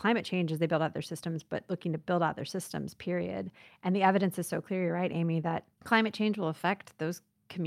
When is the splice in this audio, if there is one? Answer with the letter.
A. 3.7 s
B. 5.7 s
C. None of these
B